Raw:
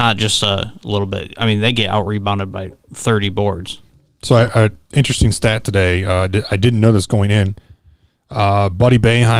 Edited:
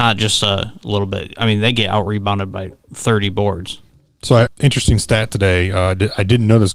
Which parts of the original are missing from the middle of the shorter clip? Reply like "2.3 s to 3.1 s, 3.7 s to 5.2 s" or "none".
4.5 s to 4.8 s